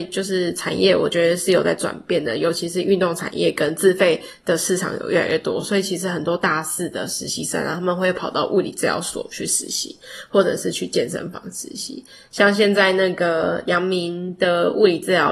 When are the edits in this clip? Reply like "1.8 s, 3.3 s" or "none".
none